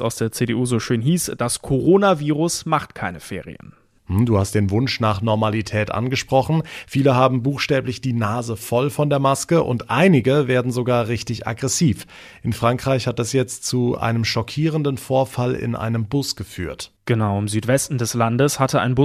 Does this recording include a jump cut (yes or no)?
yes